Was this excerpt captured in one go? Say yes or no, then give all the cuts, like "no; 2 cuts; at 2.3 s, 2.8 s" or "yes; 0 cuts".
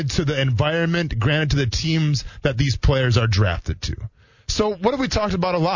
yes; 0 cuts